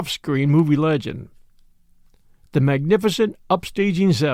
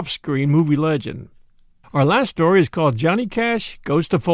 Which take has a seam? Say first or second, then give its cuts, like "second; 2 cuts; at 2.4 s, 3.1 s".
second; 1 cut; at 1.8 s